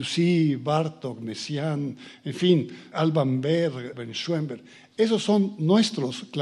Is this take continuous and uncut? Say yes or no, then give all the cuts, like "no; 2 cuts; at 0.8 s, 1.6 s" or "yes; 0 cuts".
no; 2 cuts; at 2.9 s, 3.9 s